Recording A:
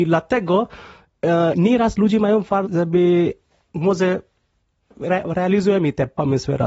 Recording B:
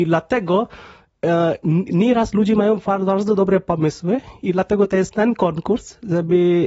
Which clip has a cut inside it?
A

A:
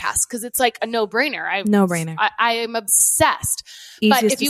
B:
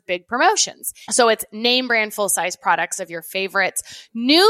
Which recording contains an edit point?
B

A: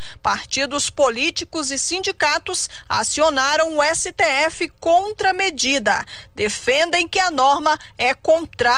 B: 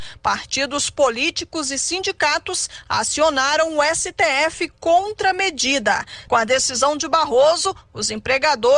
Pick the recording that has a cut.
B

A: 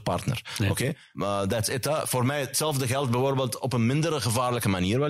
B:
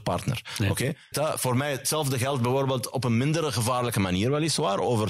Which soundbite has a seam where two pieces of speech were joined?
B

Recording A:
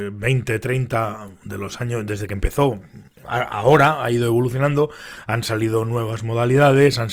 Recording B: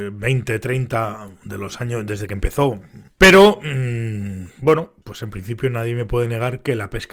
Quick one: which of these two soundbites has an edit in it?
B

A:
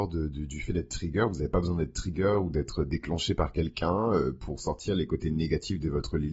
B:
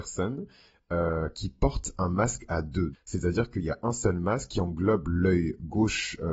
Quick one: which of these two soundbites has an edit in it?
B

